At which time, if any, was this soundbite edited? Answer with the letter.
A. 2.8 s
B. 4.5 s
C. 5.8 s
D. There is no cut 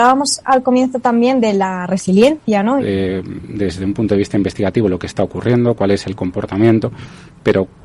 A